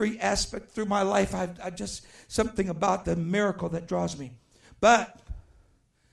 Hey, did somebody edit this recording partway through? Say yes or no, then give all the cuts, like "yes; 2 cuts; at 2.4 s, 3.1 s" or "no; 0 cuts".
no; 0 cuts